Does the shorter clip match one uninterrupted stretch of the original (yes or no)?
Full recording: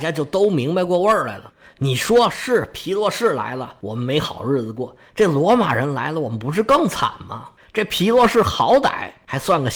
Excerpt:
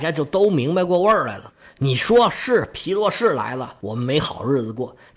yes